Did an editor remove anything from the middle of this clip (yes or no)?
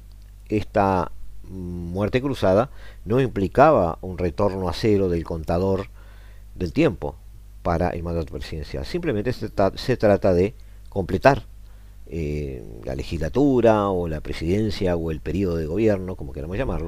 no